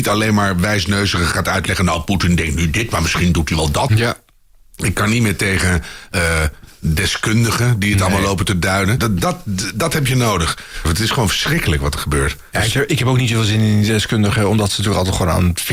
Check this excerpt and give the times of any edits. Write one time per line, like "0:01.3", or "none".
0:03.9
0:09.0
0:10.8